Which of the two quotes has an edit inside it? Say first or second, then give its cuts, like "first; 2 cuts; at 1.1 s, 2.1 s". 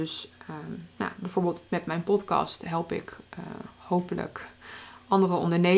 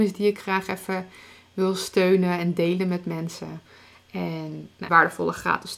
second; 1 cut; at 4.9 s